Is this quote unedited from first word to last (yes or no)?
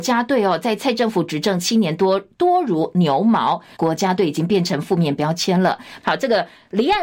no